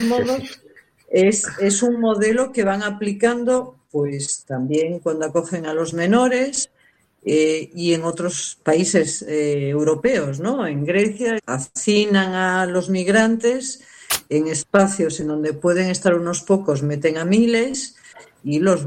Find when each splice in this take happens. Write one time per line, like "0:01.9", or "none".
0:11.4